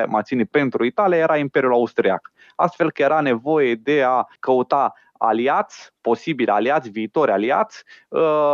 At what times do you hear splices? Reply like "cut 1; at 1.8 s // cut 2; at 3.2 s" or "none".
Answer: cut 1; at 4.4 s